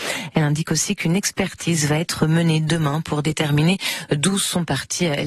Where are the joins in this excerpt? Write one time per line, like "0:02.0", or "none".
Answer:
none